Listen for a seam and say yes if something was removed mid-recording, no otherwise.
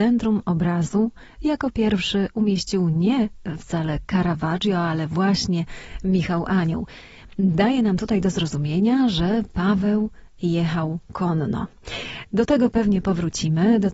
no